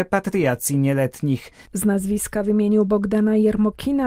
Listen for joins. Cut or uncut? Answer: cut